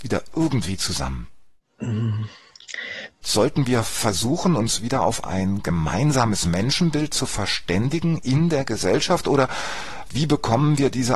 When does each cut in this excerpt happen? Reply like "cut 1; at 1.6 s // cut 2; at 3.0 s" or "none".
cut 1; at 3.2 s